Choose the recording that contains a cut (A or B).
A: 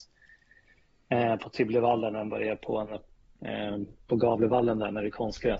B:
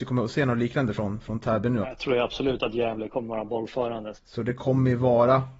B